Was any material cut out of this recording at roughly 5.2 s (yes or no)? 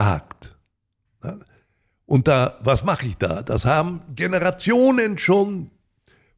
no